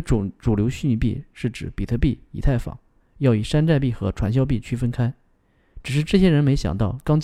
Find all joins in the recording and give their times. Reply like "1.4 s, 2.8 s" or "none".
none